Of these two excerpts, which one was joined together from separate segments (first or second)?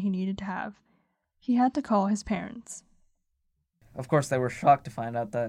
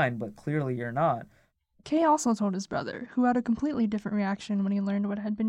first